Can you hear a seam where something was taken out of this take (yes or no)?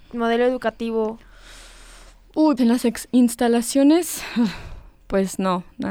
yes